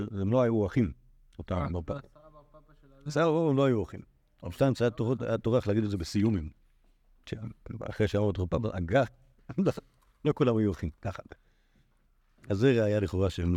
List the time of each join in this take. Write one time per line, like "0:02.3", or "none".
none